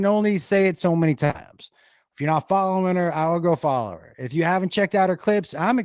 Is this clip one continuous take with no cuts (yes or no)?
yes